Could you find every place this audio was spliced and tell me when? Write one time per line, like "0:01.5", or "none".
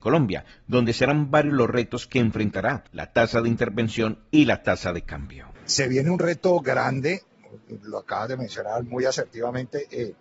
0:02.9